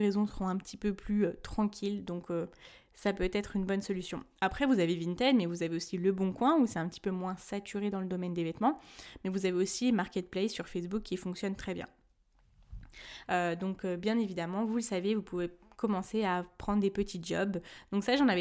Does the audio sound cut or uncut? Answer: cut